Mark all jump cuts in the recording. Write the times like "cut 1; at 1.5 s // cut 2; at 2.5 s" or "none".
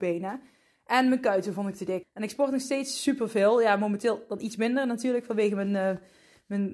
cut 1; at 2.0 s